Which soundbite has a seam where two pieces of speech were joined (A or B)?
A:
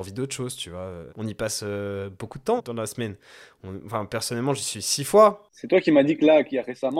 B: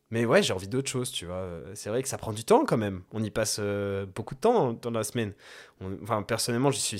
A